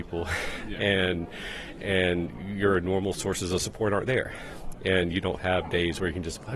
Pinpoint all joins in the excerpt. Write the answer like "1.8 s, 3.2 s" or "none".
none